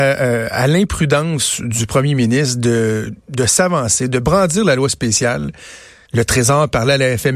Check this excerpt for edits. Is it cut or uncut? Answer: cut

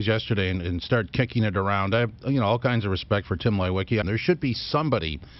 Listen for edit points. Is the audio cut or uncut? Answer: cut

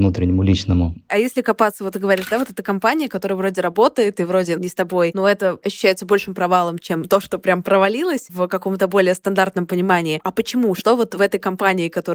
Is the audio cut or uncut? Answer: uncut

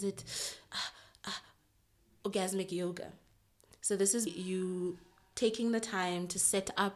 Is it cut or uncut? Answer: cut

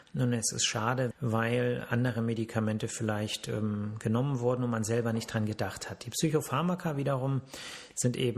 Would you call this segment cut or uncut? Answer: cut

